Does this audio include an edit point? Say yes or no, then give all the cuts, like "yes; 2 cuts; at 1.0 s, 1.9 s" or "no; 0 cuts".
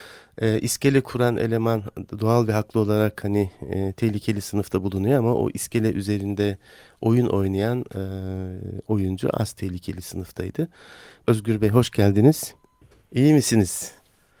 yes; 2 cuts; at 11.2 s, 13.0 s